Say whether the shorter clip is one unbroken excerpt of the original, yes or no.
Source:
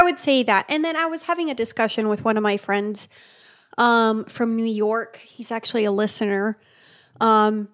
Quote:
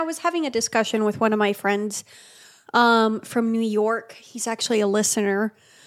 yes